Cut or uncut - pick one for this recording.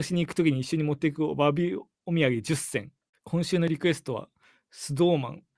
cut